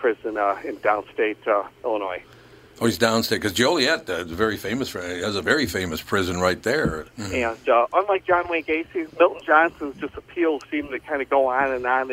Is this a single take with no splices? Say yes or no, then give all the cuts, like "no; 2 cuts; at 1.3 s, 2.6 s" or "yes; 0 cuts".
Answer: no; 3 cuts; at 7.0 s, 9.1 s, 10.6 s